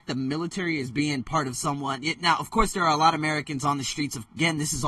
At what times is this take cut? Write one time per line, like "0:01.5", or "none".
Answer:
none